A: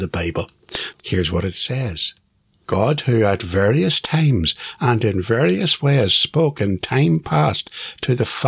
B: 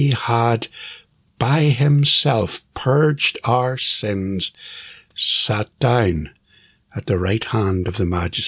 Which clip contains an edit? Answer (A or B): A